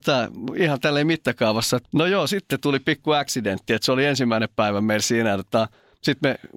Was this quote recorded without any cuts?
no; 1 cut; at 1.8 s

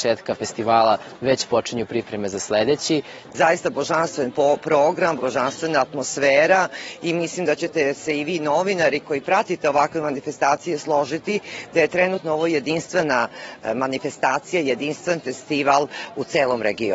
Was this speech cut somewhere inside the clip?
yes; 2 cuts; at 3.3 s, 5.2 s

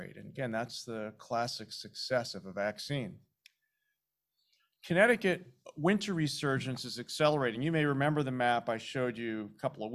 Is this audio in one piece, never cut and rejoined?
yes; 0 cuts

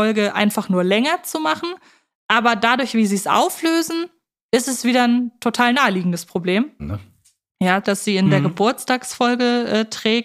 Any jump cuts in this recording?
yes; 2 cuts; at 6.8 s, 7.8 s

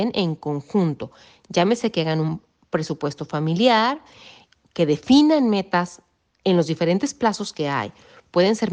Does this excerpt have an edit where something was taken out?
no; 0 cuts

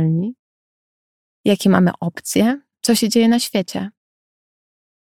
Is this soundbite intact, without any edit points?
no; 1 cut; at 2.7 s

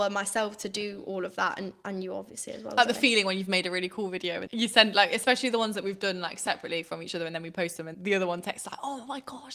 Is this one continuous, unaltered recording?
no; 2 cuts; at 4.5 s, 7.9 s

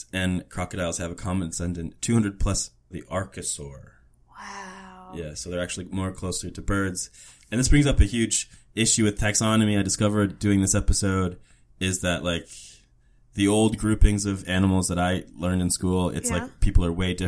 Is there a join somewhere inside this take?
yes; 1 cut; at 2.9 s

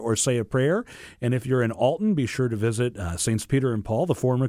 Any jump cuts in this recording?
no; 0 cuts

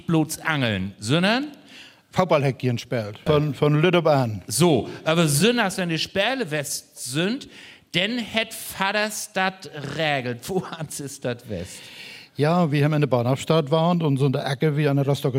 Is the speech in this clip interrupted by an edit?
yes; 1 cut; at 3.3 s

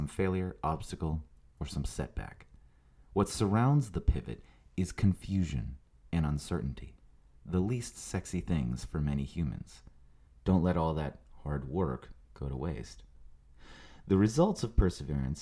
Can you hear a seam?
yes; 1 cut; at 10.3 s

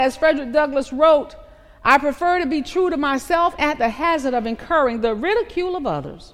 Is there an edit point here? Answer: yes; 1 cut; at 3.6 s

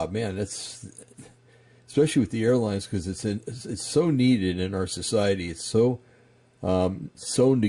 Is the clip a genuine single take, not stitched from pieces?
yes; 0 cuts

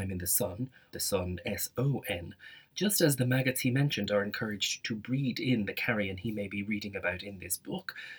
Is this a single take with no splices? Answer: no; 2 cuts; at 0.9 s, 2.7 s

